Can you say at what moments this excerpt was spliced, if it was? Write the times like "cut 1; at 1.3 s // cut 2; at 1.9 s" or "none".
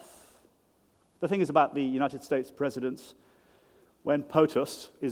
cut 1; at 1.1 s